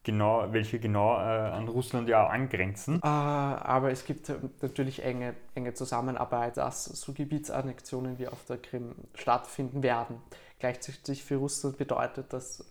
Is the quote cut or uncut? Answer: cut